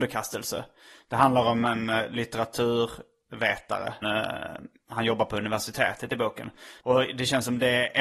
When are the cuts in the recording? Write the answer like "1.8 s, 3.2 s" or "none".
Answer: 4.0 s, 6.8 s